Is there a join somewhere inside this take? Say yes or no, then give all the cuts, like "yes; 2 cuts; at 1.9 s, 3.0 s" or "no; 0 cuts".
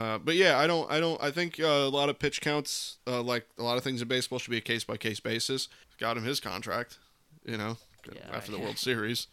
yes; 1 cut; at 5.8 s